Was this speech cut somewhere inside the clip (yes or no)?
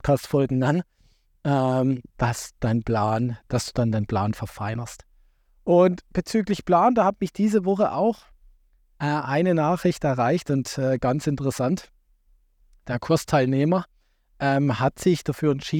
no